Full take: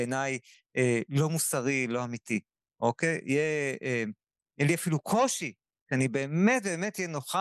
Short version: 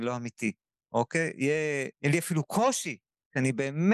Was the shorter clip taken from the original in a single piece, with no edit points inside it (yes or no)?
no